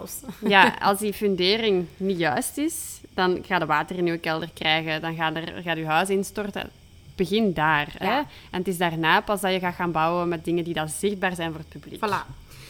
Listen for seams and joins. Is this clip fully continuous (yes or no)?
yes